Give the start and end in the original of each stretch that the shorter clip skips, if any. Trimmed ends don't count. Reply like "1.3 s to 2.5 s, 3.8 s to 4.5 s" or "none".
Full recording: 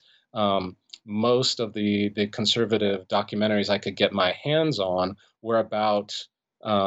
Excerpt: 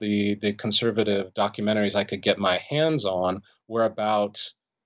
none